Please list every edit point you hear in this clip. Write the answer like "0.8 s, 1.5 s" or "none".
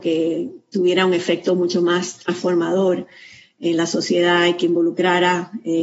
none